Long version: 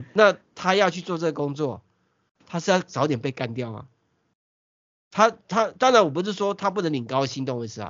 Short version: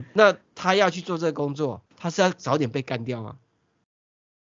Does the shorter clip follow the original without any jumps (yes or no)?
no